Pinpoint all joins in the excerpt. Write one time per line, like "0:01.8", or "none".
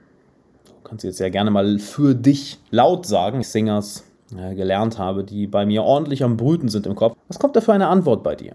0:03.4
0:07.1